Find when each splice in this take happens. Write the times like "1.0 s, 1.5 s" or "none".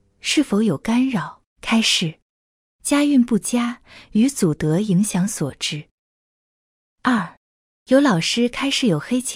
1.5 s